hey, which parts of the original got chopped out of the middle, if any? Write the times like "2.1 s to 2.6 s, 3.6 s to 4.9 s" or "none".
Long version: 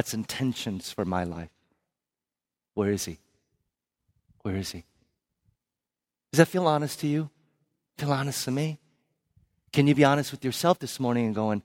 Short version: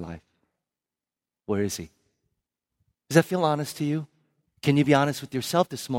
4.2 s to 6.2 s, 7.7 s to 9.6 s